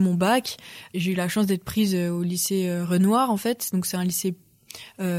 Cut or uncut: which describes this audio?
uncut